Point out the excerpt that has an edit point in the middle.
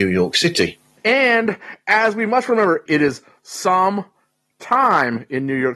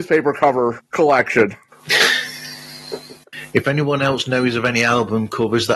first; 1 cut; at 2.9 s

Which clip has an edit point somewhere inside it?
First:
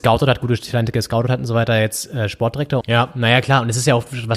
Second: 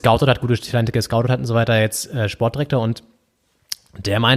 first; 1 cut; at 2.8 s

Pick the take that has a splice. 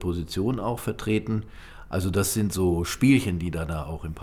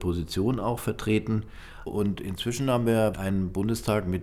second; 2 cuts; at 1.9 s, 3.1 s

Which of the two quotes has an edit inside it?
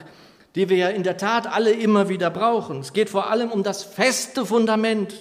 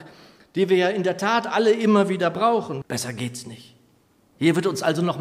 second; 1 cut; at 2.8 s

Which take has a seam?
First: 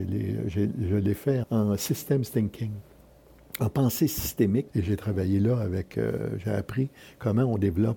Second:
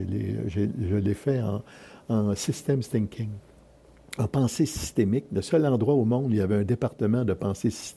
first; 2 cuts; at 1.4 s, 4.7 s

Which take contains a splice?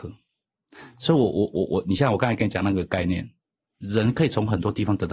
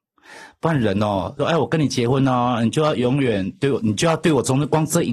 second; 1 cut; at 1.4 s

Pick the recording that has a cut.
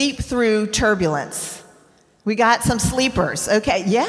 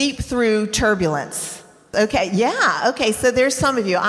second; 1 cut; at 1.9 s

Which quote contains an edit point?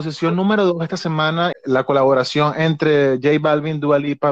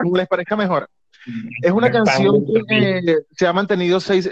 first; 1 cut; at 1.5 s

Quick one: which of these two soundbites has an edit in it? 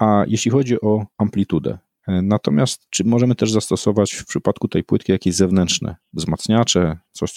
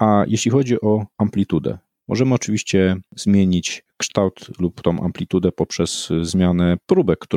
first; 1 cut; at 2.0 s

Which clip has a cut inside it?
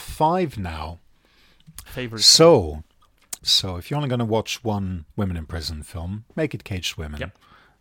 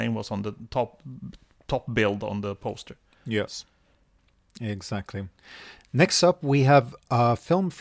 first; 3 cuts; at 1.9 s, 3.4 s, 5.1 s

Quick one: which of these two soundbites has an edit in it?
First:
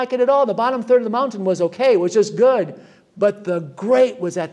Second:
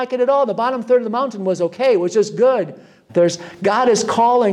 second; 1 cut; at 3.1 s

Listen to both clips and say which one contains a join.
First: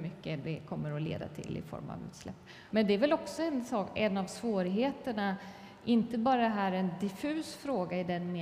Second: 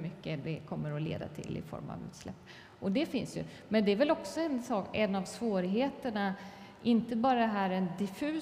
first; 1 cut; at 2.7 s

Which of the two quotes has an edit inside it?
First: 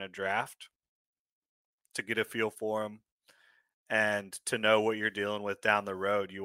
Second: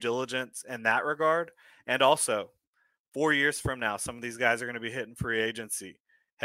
first; 1 cut; at 1.9 s

